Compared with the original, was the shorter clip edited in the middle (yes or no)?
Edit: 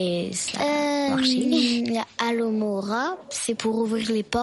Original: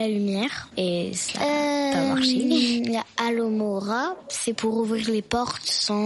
yes